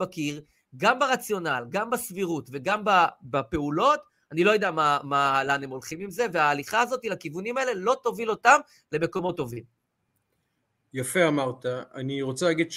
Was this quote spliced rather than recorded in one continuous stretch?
no; 0 cuts

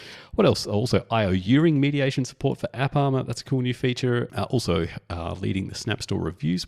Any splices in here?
yes; 1 cut; at 4.3 s

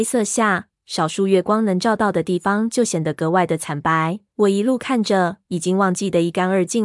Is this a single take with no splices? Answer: no; 2 cuts; at 4.3 s, 5.5 s

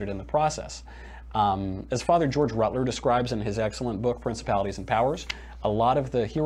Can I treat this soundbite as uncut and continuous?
yes; 0 cuts

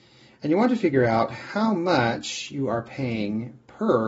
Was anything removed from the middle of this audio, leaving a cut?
no; 0 cuts

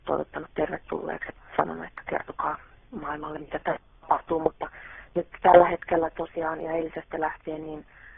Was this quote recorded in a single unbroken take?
yes; 0 cuts

